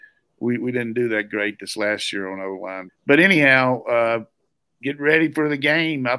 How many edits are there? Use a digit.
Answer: 1